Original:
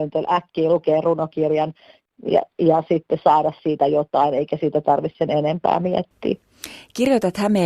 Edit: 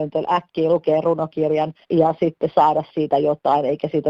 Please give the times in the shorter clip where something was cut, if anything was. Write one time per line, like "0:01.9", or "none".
0:01.8

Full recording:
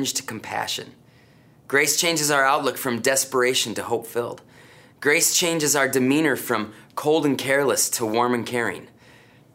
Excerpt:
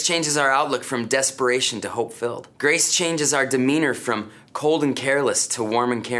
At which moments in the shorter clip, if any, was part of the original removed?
0:02.5

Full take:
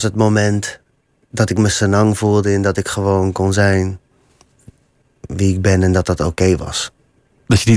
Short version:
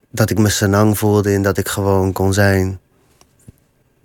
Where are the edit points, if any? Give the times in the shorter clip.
none

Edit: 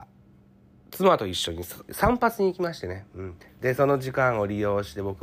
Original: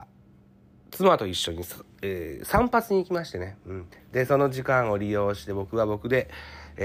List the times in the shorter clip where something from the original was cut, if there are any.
0:01.9

